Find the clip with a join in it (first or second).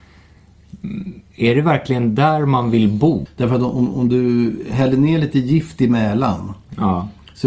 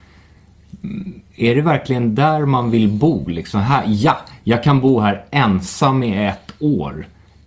first